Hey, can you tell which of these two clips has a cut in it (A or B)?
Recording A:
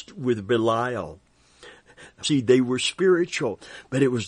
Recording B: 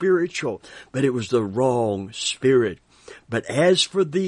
A